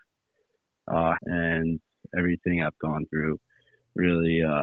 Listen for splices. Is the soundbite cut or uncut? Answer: cut